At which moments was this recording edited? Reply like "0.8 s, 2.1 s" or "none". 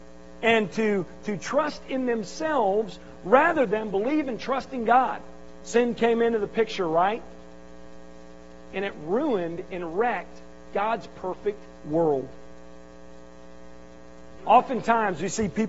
5.6 s, 14.4 s